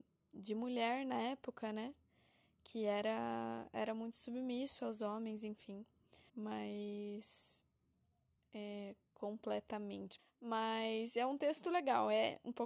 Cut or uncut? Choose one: cut